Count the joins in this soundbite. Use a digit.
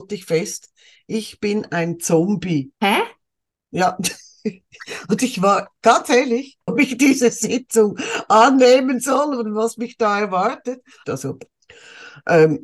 3